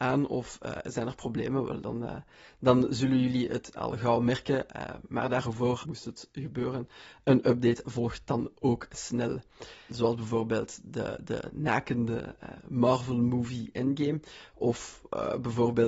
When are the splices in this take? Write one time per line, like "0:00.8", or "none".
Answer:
0:05.8
0:09.9

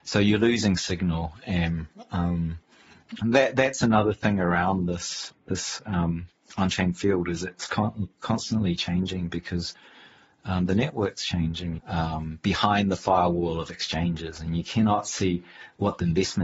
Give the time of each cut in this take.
0:03.2
0:11.8

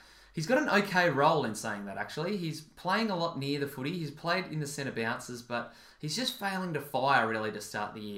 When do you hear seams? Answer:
none

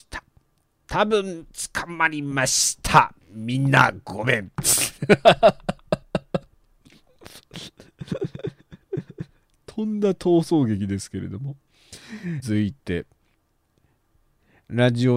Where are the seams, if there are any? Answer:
0:12.4

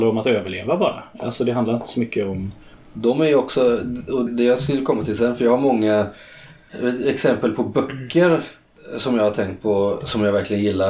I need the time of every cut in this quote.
0:04.3

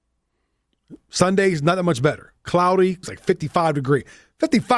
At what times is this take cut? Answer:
0:03.0

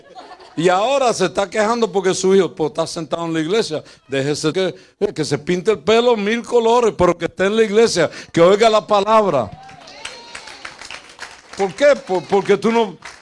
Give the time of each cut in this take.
0:04.5

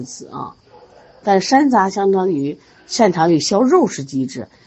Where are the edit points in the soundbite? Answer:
0:01.2

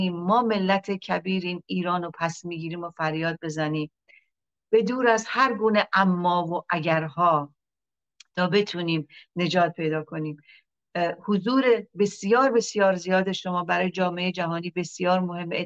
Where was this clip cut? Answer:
none

